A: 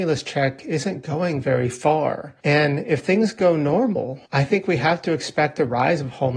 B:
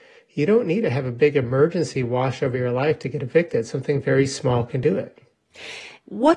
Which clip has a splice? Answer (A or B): A